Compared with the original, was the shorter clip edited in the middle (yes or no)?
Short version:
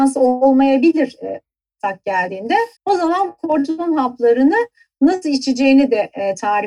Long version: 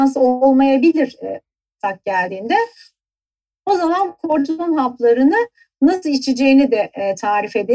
yes